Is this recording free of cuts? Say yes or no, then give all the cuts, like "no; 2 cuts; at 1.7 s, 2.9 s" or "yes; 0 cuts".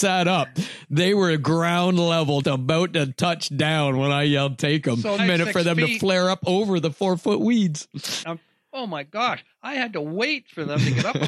no; 3 cuts; at 2.4 s, 5.2 s, 8.2 s